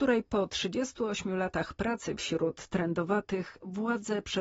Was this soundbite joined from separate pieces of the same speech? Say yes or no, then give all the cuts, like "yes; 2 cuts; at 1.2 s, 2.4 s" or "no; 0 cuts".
no; 0 cuts